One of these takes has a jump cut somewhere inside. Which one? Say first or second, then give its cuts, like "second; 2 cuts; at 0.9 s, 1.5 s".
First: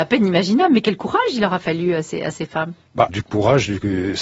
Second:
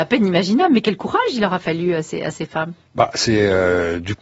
first; 1 cut; at 3.1 s